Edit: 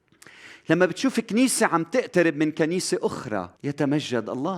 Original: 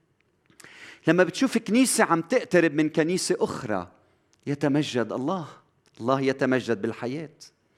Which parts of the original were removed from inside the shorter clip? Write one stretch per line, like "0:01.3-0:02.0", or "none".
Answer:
0:03.9-0:04.4